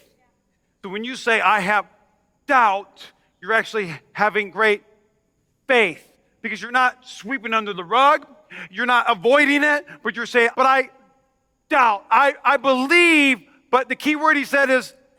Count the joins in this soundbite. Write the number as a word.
one